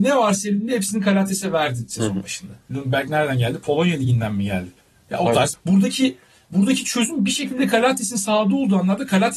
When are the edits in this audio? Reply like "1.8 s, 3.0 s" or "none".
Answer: 2.7 s, 5.5 s